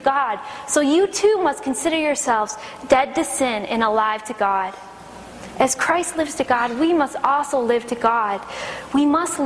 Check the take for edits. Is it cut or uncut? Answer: uncut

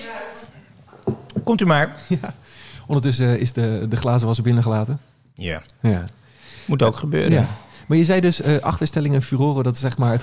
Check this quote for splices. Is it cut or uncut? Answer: uncut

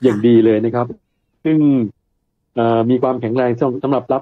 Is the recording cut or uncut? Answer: uncut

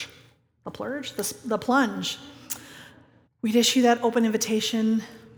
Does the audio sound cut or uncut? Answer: cut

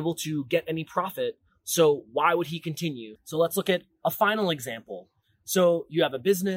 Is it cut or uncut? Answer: cut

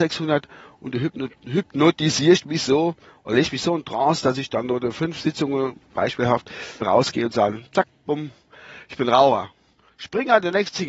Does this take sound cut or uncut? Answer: cut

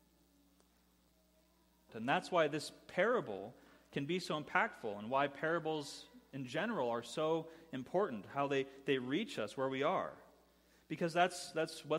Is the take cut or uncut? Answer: cut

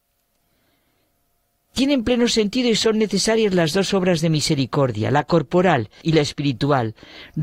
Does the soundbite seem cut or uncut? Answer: cut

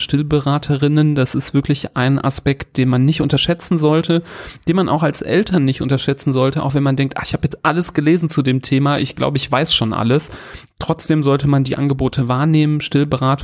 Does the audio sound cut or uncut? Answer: uncut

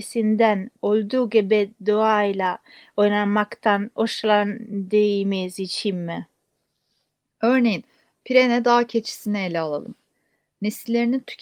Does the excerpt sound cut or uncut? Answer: uncut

